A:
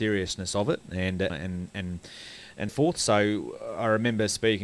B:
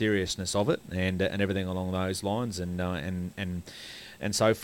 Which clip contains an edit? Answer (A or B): A